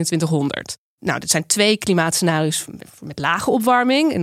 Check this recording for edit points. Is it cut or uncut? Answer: uncut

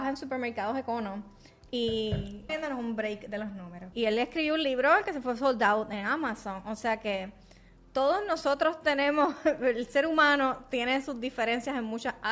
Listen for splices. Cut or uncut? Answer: cut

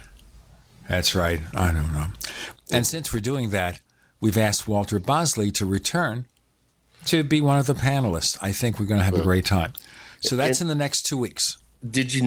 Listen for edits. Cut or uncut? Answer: cut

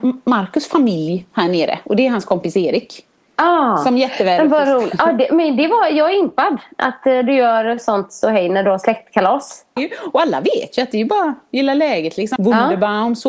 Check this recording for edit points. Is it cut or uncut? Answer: cut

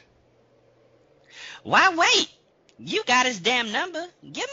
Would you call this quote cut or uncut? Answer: uncut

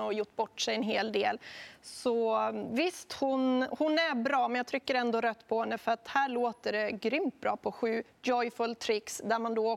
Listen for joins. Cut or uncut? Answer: uncut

